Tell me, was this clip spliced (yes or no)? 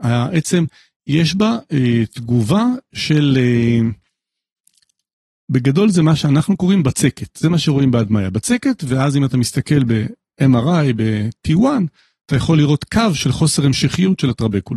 no